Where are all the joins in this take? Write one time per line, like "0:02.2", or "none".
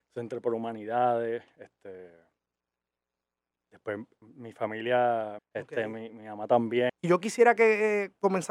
0:04.2
0:05.4
0:06.9